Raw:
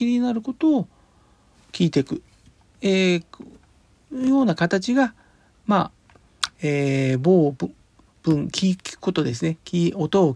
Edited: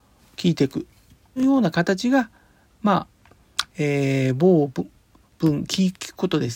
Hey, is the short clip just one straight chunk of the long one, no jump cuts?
no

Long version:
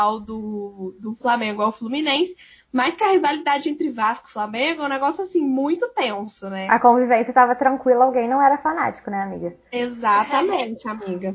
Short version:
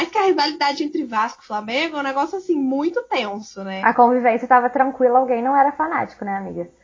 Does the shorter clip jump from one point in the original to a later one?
no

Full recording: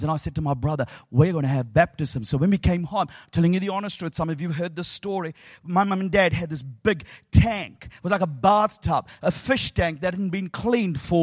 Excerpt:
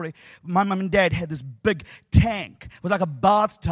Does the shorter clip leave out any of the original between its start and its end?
no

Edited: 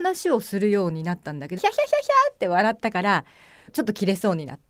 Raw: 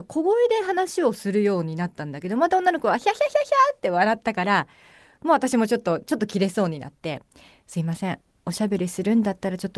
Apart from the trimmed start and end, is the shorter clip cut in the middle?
yes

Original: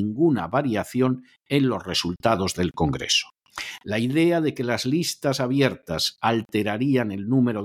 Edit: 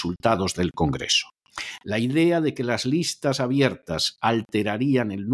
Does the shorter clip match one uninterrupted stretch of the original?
yes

